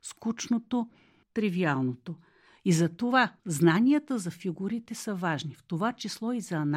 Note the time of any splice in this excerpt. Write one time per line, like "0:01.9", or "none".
0:01.2
0:03.4